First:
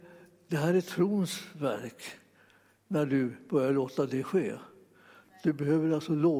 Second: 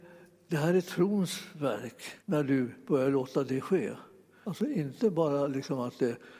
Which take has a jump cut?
second; 2 cuts; at 2.2 s, 4.4 s

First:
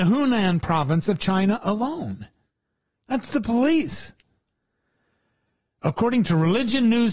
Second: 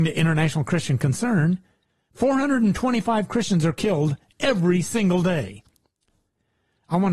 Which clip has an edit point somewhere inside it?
first; 1 cut; at 3.0 s

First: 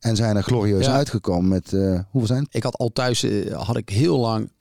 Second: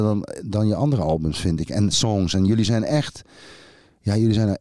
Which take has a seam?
first; 1 cut; at 2.5 s

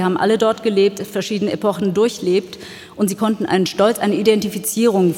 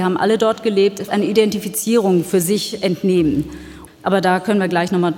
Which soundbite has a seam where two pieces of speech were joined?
second; 2 cuts; at 1.1 s, 3.9 s

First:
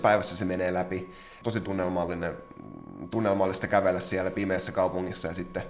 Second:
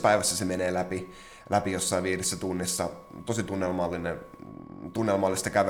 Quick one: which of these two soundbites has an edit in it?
first; 1 cut; at 1.4 s

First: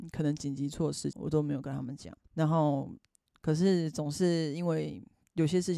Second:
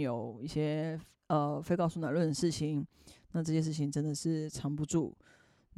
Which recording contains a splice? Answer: first; 2 cuts; at 1.1 s, 2.2 s

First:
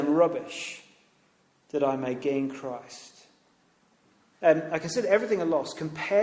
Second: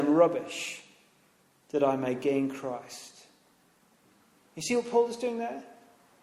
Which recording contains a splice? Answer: first; 1 cut; at 4.3 s

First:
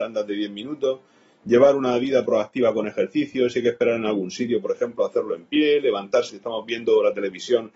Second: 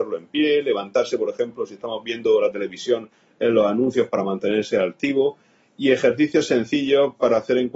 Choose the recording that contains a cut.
first; 1 cut; at 6.3 s

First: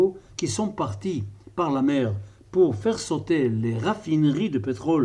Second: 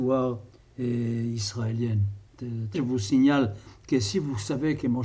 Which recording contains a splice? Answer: second; 1 cut; at 2.7 s

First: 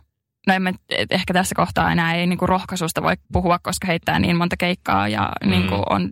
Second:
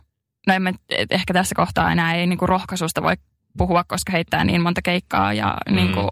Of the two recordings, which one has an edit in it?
first; 1 cut; at 3.2 s

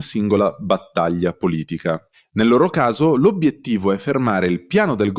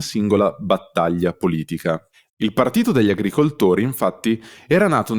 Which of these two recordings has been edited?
second; 1 cut; at 2.3 s

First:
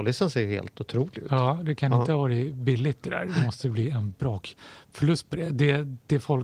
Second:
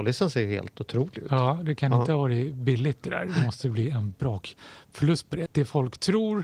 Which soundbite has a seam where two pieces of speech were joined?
second; 1 cut; at 5.5 s

